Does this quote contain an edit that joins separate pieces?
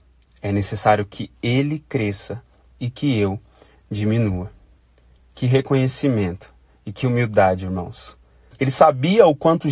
yes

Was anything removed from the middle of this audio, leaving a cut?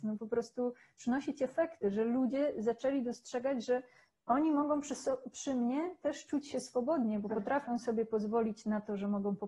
no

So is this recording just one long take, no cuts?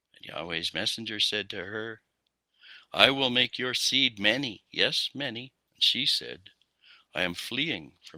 no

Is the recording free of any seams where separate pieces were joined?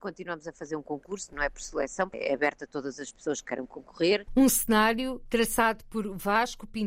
no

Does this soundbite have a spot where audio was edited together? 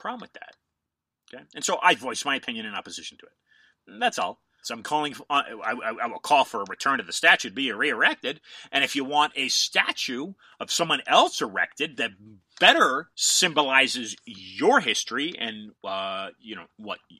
yes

